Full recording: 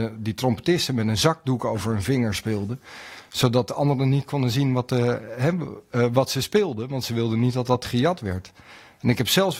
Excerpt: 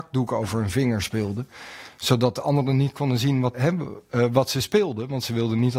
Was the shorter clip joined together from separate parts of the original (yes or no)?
yes